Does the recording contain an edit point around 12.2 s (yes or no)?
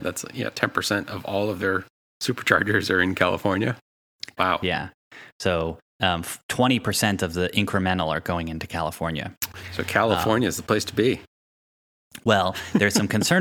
no